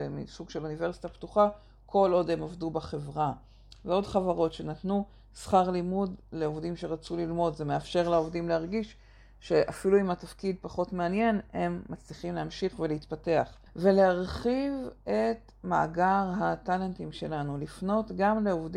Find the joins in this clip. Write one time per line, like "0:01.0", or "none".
0:13.7